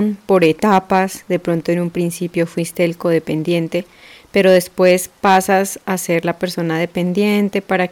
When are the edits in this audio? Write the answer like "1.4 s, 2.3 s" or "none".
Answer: none